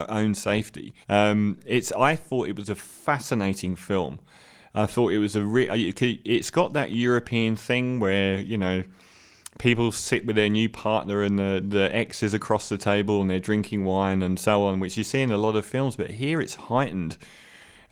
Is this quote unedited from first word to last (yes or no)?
no